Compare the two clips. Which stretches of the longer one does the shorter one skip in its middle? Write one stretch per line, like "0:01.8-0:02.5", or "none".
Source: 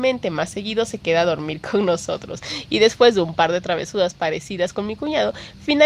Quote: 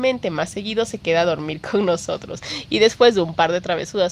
none